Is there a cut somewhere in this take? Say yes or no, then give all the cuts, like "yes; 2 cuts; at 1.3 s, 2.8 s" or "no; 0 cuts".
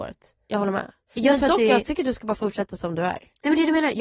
no; 0 cuts